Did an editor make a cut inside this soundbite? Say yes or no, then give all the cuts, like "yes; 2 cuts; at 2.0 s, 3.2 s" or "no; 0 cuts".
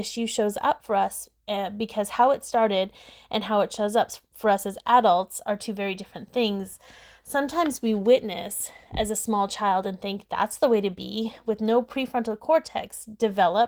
no; 0 cuts